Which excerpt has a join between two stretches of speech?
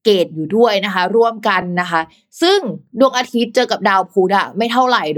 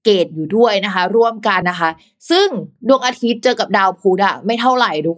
second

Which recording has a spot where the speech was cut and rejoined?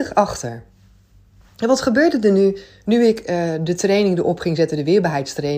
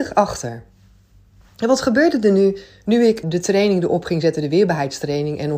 second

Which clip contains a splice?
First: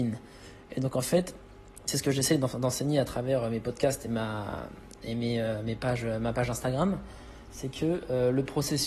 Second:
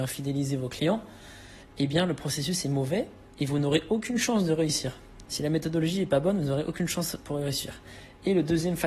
second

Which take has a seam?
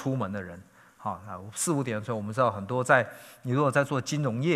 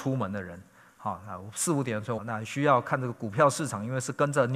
second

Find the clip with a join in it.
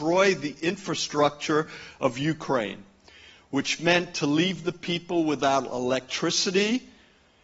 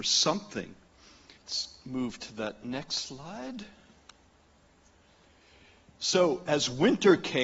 second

